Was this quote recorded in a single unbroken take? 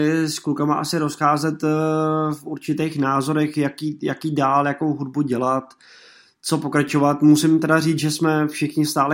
yes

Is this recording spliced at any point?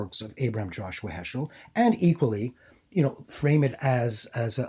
no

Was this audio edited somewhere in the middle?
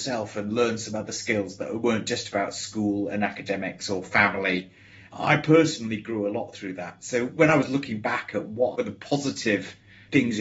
no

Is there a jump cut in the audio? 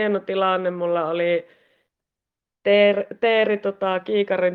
no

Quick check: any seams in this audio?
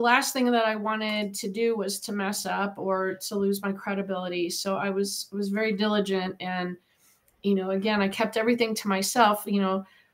no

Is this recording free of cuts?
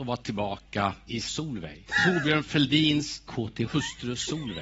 yes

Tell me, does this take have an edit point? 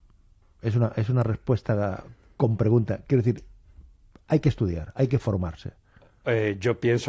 no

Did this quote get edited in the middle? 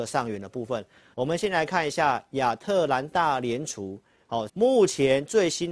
yes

